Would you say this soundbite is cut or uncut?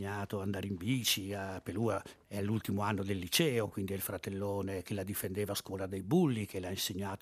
uncut